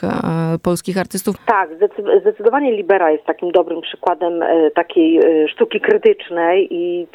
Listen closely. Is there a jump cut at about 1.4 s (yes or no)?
yes